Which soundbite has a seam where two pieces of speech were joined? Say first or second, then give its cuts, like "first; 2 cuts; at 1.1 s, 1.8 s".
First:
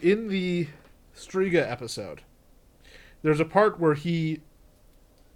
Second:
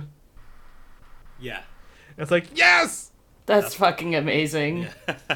second; 1 cut; at 3.3 s